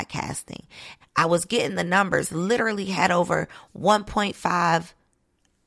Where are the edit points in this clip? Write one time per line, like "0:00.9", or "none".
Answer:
0:01.0